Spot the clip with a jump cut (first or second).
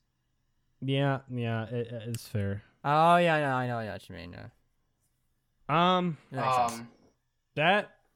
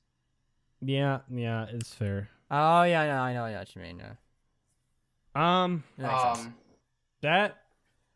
second